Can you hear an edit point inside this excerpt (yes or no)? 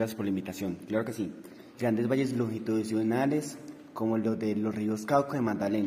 yes